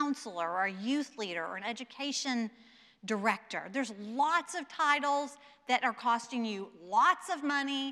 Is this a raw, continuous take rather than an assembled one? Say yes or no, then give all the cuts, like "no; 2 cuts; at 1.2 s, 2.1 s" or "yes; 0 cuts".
yes; 0 cuts